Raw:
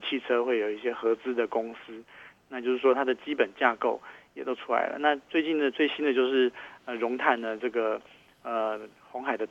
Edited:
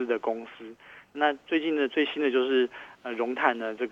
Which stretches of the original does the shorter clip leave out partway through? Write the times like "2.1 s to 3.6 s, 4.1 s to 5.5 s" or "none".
2.4 s to 5.0 s

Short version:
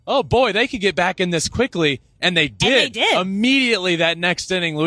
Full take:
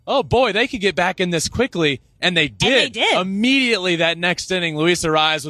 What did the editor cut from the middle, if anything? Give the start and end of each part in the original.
none

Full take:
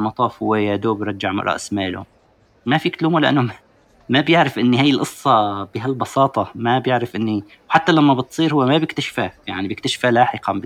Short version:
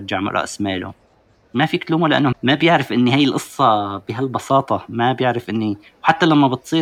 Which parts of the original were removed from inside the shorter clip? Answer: 3.4 s to 4.0 s

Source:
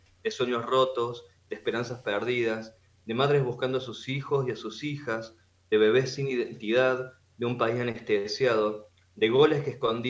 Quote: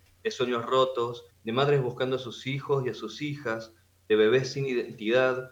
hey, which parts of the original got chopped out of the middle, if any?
1.3 s to 2.9 s

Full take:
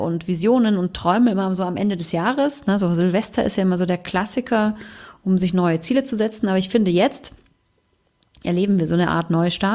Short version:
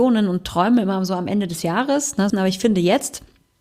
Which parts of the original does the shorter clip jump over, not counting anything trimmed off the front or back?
2.8 s to 6.4 s

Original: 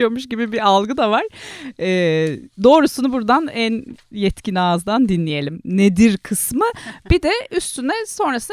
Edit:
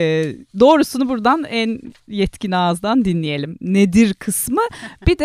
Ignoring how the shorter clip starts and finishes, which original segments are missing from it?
none

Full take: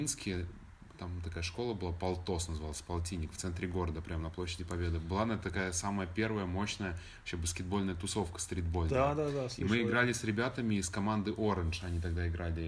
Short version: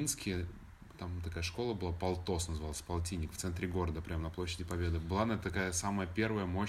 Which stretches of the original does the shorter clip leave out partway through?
none

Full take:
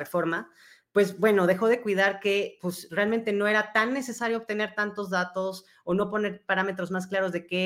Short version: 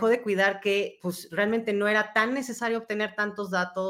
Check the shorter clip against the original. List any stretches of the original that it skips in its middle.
none

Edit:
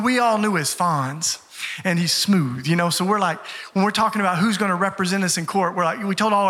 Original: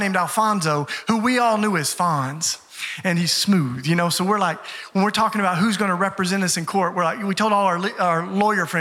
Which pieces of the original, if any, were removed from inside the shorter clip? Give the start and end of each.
none

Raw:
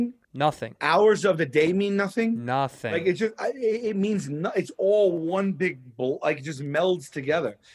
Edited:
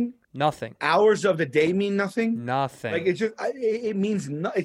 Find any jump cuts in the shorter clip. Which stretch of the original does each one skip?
none

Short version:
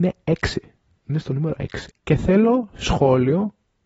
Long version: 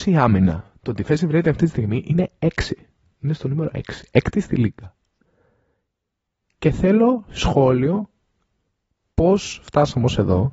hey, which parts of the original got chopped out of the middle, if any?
4.1 s to 6.5 s

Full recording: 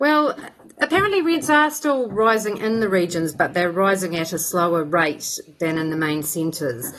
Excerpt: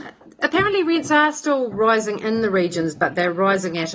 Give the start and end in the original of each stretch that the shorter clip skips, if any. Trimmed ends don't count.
none

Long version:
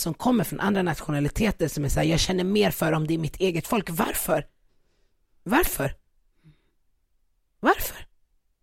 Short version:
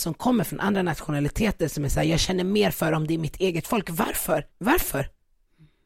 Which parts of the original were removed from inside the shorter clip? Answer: 4.5 s to 5.4 s

